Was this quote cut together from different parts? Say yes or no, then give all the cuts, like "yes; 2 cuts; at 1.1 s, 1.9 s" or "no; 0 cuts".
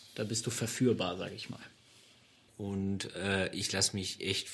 yes; 1 cut; at 2.5 s